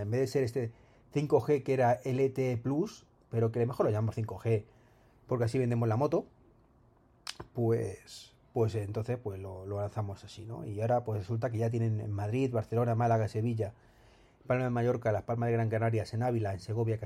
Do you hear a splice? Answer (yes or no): no